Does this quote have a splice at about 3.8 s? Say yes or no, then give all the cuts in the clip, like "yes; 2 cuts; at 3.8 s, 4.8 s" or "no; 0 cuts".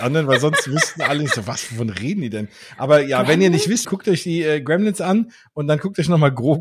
yes; 1 cut; at 3.8 s